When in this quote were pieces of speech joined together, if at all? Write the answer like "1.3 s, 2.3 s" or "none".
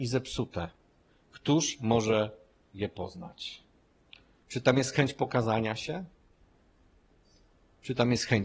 4.4 s